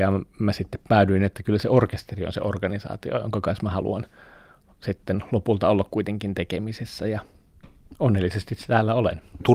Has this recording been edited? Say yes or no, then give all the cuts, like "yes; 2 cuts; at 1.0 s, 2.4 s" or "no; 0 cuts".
no; 0 cuts